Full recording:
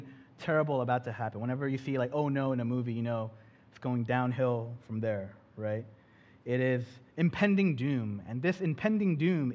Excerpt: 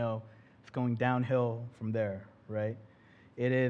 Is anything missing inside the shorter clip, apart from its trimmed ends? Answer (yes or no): no